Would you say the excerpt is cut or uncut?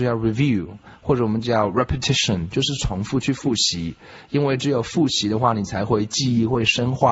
uncut